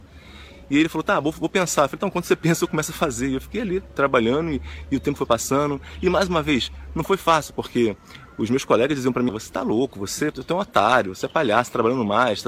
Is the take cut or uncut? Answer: cut